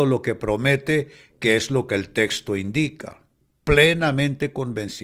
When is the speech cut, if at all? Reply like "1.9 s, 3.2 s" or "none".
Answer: none